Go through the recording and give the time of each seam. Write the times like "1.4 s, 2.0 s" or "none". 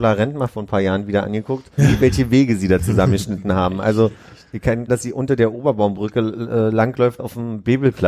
1.8 s, 4.9 s, 7.2 s